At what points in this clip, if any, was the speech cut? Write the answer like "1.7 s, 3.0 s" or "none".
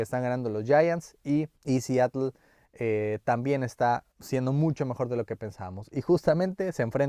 1.6 s, 4.1 s